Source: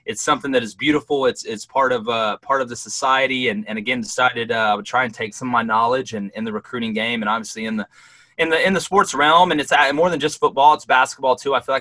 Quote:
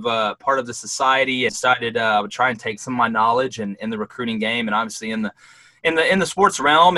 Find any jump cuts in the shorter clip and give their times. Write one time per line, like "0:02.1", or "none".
0:01.5